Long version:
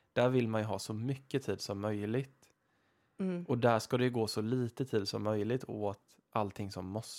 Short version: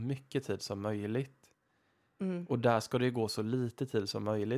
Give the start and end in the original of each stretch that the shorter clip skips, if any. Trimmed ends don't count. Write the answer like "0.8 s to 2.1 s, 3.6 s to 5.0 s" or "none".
none